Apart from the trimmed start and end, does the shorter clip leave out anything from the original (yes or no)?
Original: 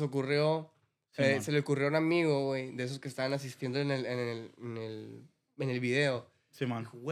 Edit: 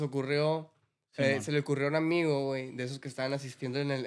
no